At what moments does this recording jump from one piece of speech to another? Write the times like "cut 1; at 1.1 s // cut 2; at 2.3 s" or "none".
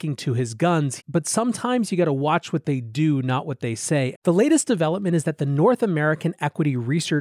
cut 1; at 1.0 s // cut 2; at 4.1 s